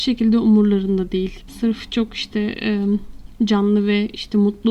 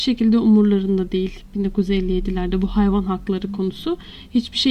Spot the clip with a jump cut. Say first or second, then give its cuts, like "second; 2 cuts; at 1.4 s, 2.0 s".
first; 1 cut; at 1.5 s